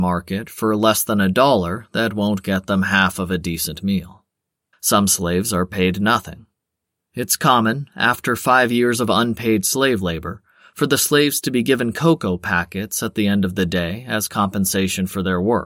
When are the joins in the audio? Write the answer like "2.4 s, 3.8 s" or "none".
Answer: 4.7 s